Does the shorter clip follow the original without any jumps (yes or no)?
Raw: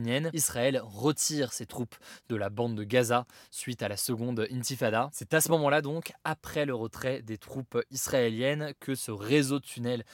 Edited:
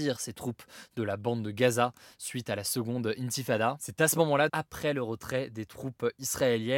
no